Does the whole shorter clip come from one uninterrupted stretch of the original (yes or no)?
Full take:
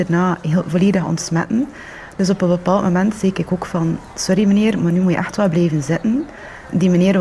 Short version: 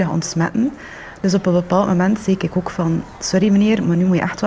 yes